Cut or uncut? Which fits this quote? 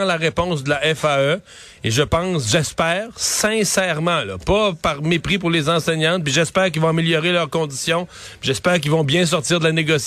uncut